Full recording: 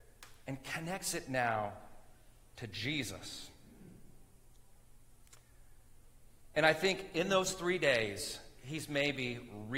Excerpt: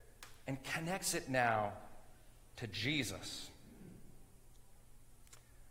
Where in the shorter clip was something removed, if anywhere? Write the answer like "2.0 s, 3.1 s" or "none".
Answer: none